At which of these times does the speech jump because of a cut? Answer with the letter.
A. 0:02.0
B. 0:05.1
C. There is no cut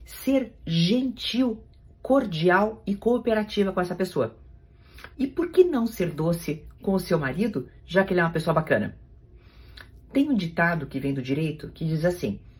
B